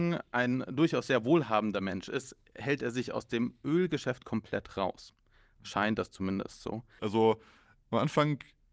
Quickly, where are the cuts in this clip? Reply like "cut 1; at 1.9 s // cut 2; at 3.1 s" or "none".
cut 1; at 7.0 s

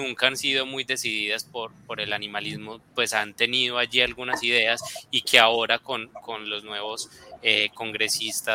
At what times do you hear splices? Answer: none

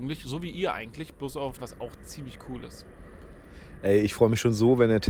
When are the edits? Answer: cut 1; at 1.6 s

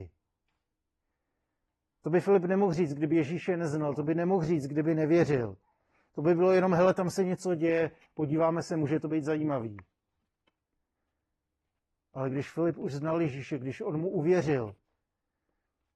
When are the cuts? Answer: none

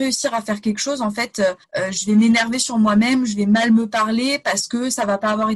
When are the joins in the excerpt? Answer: cut 1; at 1.6 s

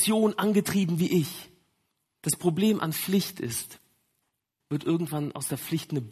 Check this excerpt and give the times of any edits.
cut 1; at 2.2 s // cut 2; at 4.6 s

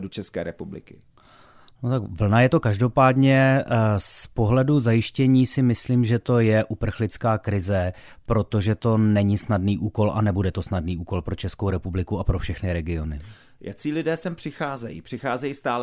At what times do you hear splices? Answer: none

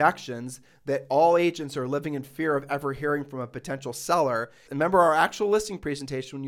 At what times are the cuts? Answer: cut 1; at 4.7 s

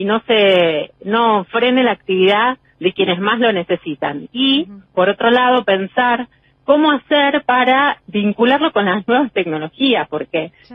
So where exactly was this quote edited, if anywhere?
cut 1; at 8.0 s

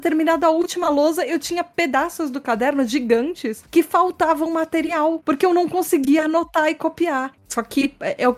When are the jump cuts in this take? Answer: cut 1; at 7.4 s

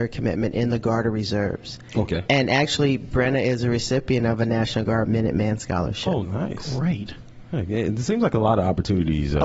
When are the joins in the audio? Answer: cut 1; at 6.2 s

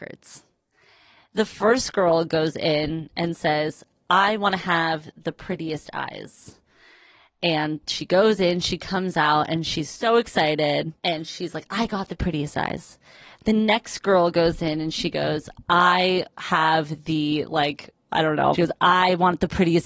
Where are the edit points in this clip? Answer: cut 1; at 11.0 s // cut 2; at 18.5 s

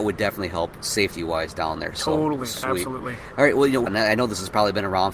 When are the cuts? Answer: cut 1; at 3.9 s

